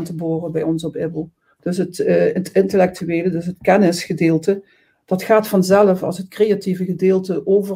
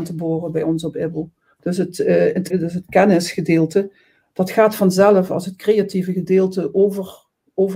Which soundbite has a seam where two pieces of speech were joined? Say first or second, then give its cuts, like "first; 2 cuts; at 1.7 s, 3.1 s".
second; 1 cut; at 2.5 s